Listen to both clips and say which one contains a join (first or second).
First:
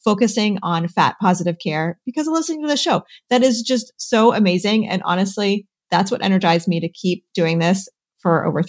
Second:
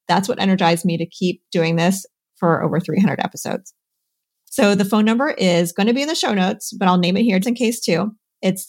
second